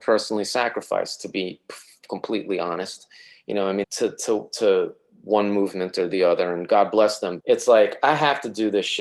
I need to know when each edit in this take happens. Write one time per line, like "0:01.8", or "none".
0:03.8
0:07.4